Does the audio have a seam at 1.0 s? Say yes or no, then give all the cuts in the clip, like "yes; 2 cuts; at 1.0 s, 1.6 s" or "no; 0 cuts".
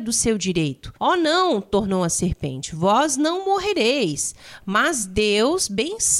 yes; 1 cut; at 1.0 s